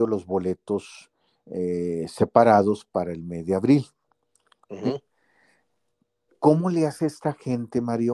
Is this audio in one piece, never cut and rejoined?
yes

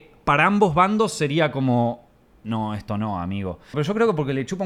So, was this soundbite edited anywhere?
yes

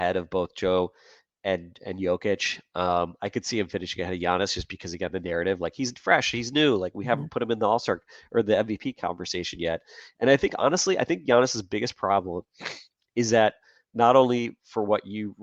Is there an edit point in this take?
no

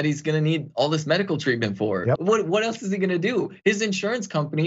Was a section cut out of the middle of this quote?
yes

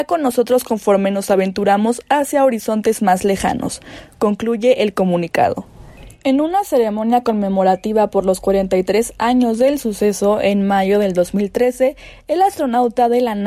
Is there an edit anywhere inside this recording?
no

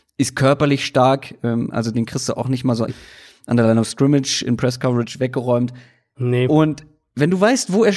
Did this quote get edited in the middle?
yes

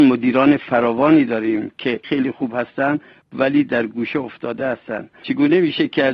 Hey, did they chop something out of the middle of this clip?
yes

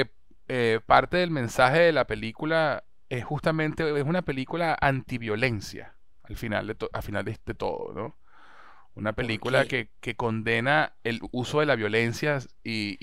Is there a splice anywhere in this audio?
yes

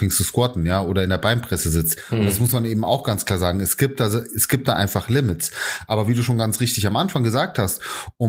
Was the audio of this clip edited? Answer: no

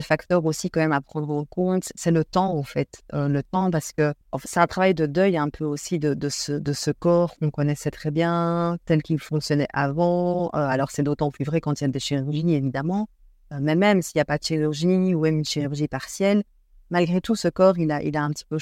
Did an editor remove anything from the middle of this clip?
yes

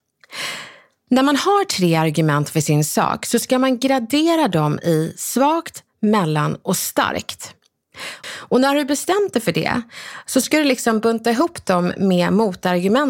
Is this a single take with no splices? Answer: no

